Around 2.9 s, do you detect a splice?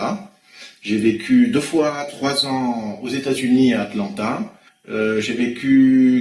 no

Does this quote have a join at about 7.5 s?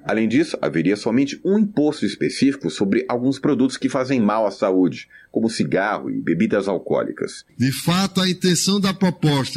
yes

